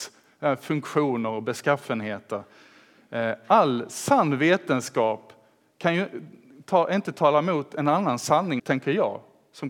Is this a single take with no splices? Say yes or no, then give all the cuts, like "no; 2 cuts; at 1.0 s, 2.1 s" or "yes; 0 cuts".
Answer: no; 1 cut; at 8.6 s